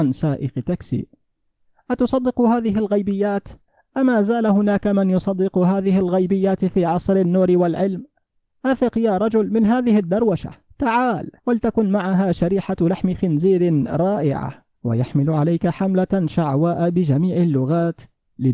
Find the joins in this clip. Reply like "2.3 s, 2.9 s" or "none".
11.4 s, 14.7 s

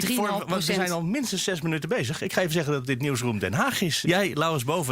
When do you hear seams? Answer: 4.0 s

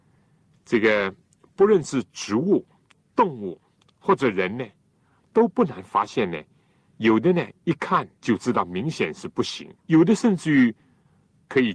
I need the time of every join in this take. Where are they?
6.8 s, 8.2 s, 9.8 s

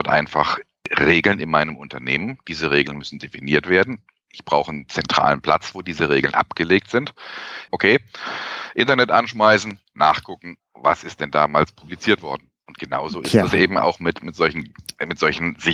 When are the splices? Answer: 7.7 s

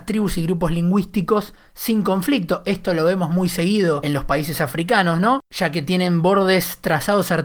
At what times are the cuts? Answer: none

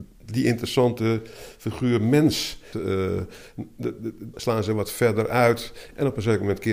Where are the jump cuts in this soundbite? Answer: 2.7 s, 4.3 s

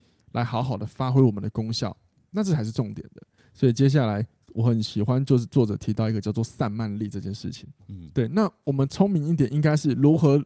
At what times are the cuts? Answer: 3.4 s, 7.8 s

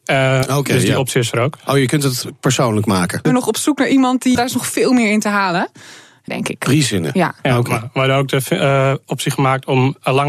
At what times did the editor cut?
3.2 s, 4.3 s, 6.3 s

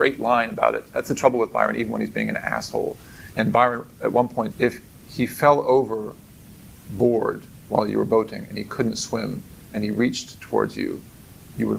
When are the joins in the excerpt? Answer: 3.3 s, 4.5 s

